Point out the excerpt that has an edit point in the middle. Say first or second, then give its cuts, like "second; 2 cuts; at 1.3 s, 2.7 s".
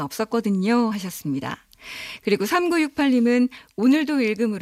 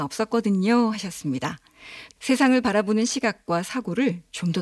second; 2 cuts; at 0.9 s, 2.2 s